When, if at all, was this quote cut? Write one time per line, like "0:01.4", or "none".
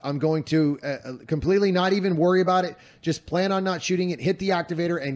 none